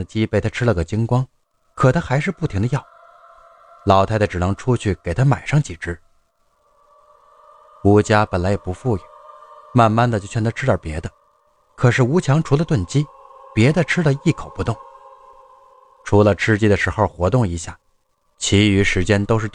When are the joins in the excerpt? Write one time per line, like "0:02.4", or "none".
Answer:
none